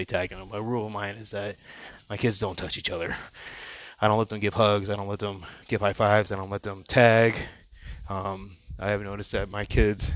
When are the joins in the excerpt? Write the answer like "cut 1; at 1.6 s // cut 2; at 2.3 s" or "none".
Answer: cut 1; at 5.6 s